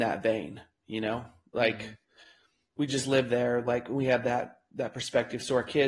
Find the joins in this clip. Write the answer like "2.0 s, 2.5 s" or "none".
none